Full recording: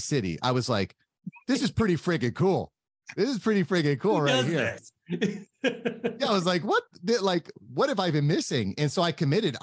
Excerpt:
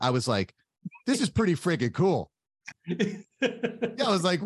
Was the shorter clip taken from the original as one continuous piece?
no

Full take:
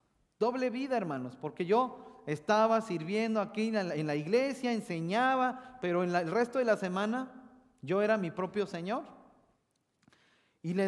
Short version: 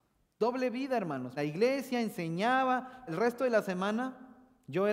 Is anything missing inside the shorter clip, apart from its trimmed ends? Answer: yes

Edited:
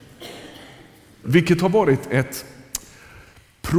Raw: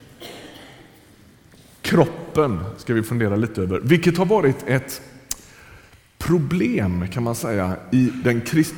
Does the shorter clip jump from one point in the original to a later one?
yes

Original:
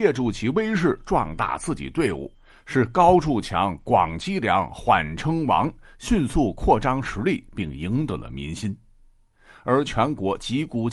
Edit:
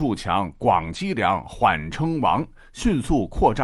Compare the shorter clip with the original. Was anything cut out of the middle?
no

